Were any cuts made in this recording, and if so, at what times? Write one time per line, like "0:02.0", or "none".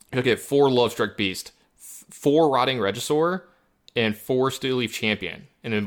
0:01.6